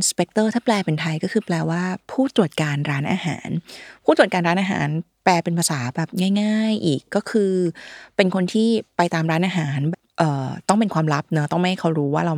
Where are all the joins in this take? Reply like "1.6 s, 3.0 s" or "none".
9.9 s